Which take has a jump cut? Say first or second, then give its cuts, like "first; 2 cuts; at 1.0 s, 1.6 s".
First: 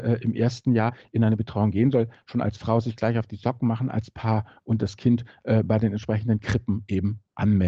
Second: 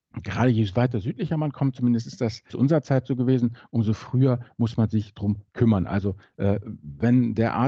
second; 1 cut; at 2.5 s